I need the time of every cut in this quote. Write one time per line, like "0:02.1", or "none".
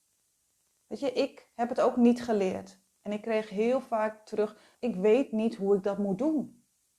0:04.7